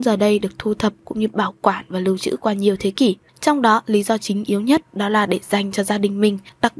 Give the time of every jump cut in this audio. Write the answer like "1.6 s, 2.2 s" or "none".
3.3 s